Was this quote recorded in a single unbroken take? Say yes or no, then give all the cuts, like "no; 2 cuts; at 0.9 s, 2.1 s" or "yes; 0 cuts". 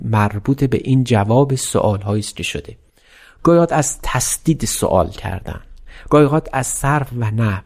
yes; 0 cuts